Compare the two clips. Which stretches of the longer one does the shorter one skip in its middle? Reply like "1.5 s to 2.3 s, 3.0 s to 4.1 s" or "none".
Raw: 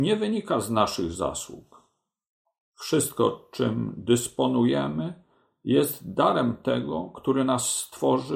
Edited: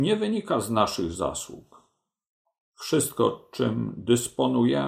none